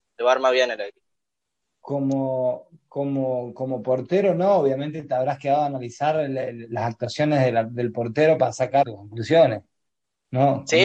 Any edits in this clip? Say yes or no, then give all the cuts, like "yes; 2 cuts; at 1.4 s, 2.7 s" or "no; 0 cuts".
yes; 1 cut; at 8.8 s